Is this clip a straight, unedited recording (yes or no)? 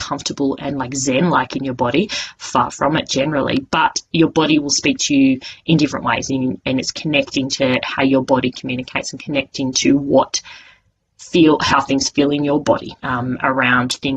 no